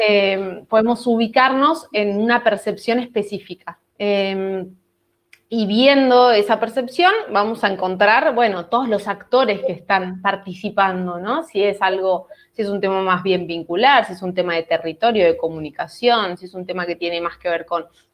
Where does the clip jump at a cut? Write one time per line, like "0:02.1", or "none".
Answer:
0:03.9